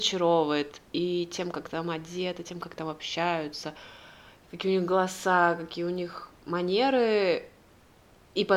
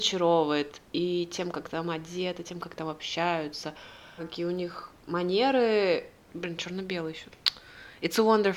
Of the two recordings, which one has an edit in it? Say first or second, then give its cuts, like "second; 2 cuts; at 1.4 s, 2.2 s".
second; 2 cuts; at 4.2 s, 6.3 s